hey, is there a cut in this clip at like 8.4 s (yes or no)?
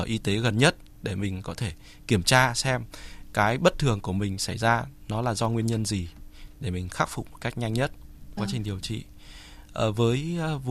yes